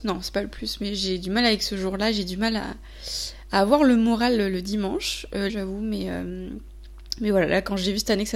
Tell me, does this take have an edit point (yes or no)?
yes